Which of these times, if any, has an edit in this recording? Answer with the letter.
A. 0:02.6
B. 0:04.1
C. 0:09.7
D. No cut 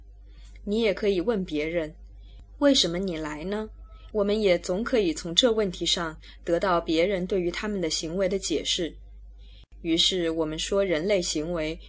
B